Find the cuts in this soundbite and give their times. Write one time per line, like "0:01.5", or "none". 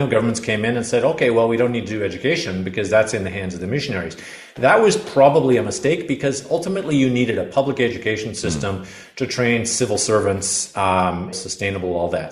0:11.3